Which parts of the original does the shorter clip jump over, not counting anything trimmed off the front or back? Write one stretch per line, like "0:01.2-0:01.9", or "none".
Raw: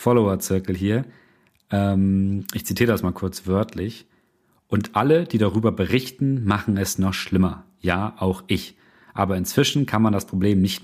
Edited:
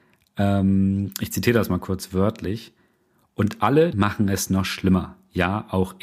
0:05.3-0:06.4